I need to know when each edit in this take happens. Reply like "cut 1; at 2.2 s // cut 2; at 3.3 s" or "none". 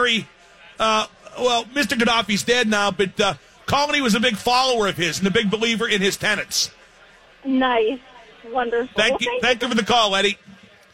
none